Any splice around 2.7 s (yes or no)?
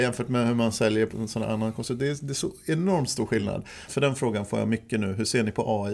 no